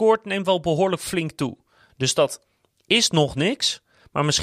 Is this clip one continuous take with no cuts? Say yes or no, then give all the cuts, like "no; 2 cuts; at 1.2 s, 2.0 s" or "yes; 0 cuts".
no; 1 cut; at 1.9 s